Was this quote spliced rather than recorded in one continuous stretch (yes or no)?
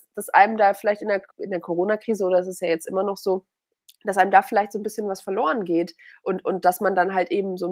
yes